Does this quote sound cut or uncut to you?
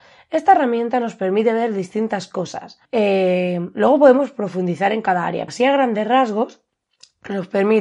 cut